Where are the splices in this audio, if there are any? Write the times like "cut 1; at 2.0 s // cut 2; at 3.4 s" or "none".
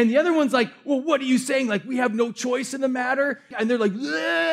cut 1; at 3.5 s